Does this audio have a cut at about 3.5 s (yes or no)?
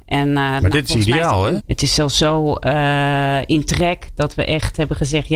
no